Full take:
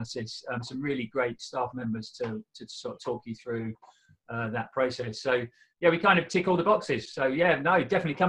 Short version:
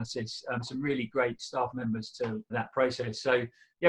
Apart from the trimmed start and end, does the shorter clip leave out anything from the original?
yes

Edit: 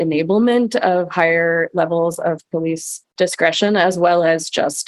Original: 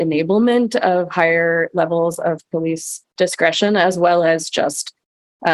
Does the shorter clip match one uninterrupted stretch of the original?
yes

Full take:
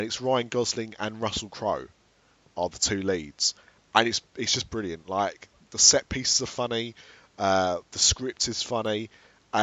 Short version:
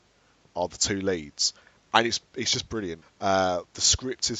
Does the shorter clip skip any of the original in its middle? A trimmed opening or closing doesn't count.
yes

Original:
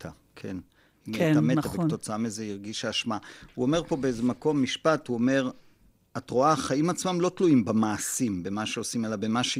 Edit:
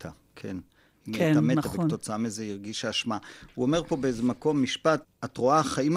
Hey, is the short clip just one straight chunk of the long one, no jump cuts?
no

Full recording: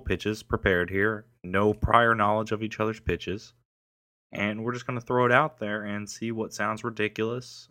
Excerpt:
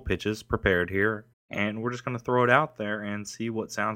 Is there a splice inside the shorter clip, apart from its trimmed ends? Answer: yes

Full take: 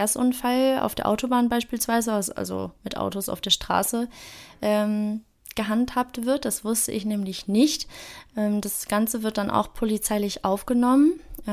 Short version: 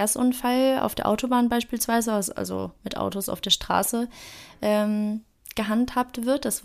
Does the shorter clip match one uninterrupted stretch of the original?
yes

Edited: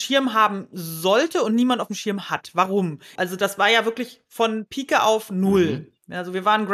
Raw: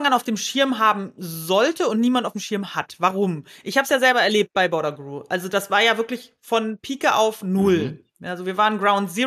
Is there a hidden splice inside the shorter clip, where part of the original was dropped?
yes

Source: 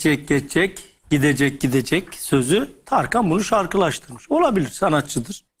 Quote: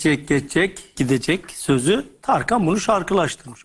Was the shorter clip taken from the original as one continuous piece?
no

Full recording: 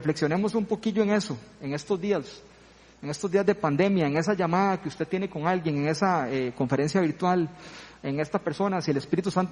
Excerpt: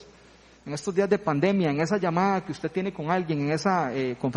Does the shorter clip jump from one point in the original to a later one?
no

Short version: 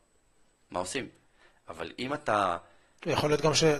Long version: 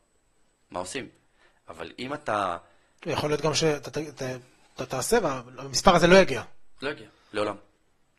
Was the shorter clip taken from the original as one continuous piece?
yes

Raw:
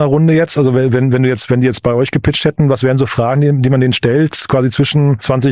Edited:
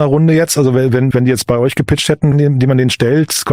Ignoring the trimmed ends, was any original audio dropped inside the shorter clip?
yes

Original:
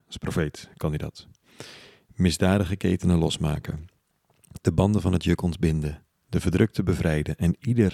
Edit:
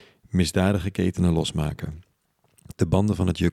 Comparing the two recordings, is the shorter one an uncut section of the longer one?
yes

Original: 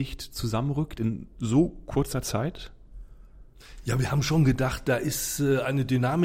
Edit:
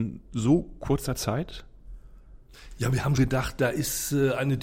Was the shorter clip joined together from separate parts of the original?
yes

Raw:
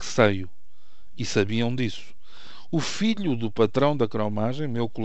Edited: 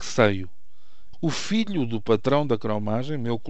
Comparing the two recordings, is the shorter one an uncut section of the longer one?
no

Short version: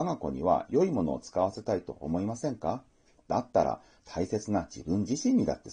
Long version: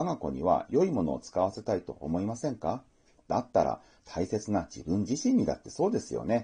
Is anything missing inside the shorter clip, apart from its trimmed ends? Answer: no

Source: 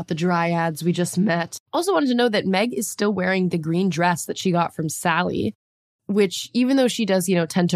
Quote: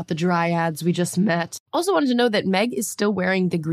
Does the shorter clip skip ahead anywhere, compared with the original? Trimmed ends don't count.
no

